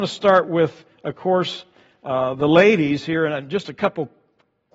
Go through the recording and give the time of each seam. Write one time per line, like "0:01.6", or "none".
none